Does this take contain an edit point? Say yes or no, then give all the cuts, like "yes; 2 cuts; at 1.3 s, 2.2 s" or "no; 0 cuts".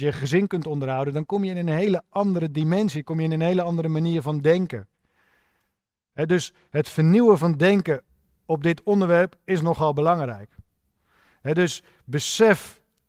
no; 0 cuts